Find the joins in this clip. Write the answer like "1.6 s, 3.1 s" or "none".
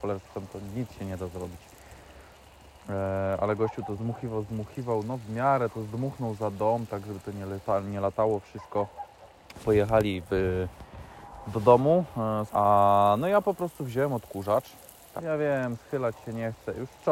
4.0 s, 12.5 s, 15.2 s